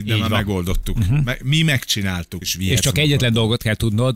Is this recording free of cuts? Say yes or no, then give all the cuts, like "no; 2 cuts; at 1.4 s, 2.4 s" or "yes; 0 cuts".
no; 1 cut; at 2.4 s